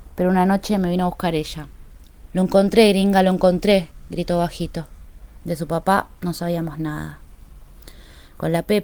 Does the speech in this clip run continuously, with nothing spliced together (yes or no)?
no